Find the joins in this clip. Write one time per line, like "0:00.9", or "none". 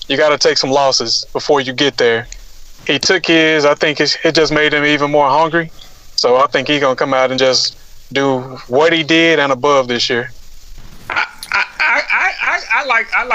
none